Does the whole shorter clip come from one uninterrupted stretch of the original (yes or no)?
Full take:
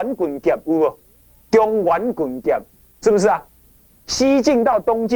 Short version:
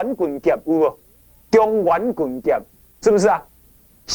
yes